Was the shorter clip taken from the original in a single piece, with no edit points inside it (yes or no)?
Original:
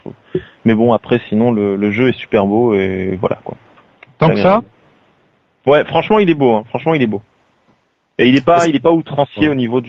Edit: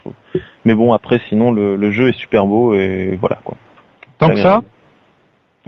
yes